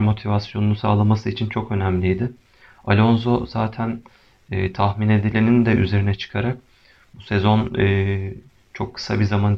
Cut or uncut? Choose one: uncut